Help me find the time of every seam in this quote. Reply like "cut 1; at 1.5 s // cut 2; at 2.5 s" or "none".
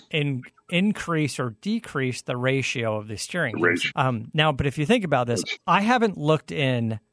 cut 1; at 3.9 s // cut 2; at 5.6 s